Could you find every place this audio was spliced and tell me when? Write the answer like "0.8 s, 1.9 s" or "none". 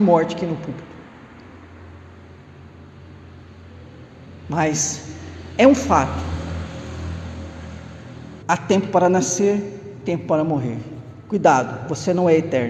8.4 s